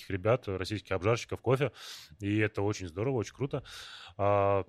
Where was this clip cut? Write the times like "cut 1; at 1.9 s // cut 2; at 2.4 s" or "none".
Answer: none